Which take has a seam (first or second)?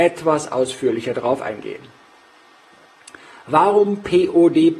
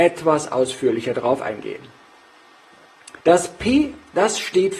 second